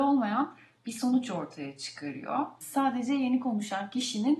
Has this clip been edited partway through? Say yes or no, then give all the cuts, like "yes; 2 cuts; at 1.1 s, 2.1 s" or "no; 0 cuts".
yes; 1 cut; at 2.6 s